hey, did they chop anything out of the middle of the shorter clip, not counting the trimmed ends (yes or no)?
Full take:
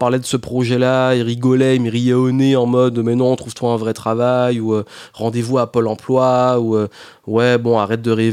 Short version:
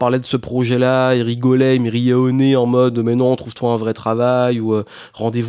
no